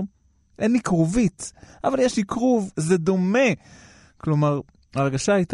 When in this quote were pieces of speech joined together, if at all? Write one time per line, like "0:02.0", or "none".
0:02.7